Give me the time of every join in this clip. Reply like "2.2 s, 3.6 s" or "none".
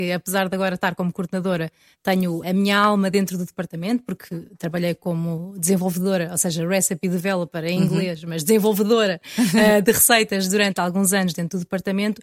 2.4 s